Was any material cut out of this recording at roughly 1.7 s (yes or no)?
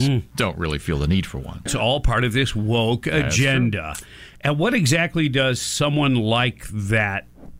yes